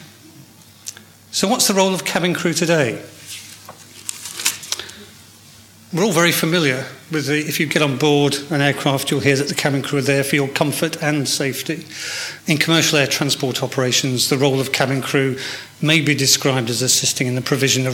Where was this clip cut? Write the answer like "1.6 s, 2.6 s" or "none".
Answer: 12.4 s

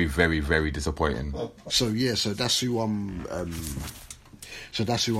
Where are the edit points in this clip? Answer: 1.7 s

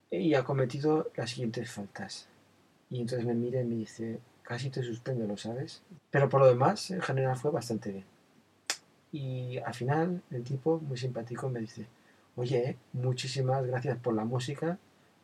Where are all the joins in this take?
5.9 s

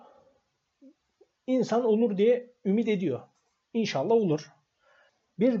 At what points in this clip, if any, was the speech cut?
none

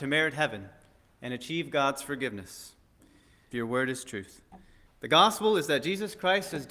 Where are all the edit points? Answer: 3.5 s, 4.9 s

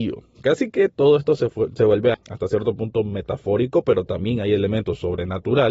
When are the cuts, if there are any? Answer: 2.1 s

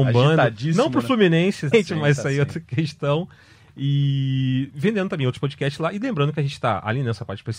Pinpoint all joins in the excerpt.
1.7 s

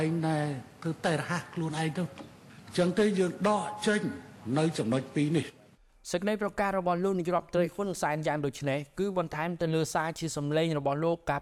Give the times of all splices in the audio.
none

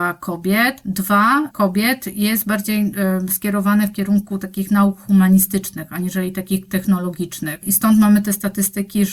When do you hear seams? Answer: 1.5 s

